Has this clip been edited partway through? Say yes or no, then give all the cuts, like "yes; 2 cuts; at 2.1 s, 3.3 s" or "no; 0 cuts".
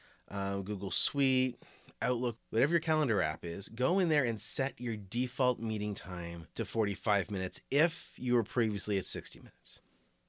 yes; 2 cuts; at 2.4 s, 6.5 s